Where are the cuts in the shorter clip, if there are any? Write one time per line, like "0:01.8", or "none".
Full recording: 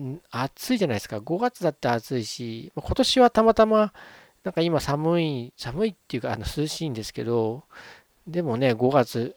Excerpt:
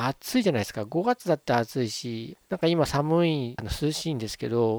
0:02.4
0:03.6